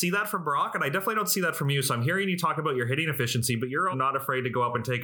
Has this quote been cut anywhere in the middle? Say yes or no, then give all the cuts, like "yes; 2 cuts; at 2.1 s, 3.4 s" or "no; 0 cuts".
yes; 1 cut; at 3.9 s